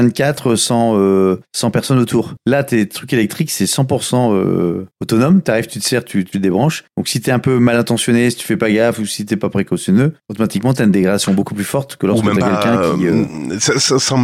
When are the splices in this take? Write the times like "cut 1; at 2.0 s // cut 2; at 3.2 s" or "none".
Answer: cut 1; at 6.3 s